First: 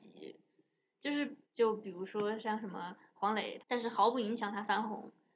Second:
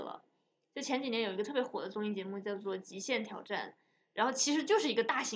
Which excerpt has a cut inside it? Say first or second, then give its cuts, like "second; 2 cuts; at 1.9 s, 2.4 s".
first; 2 cuts; at 1.4 s, 3.6 s